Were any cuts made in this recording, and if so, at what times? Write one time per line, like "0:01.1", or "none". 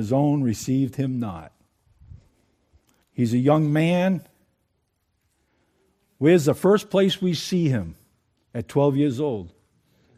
0:03.0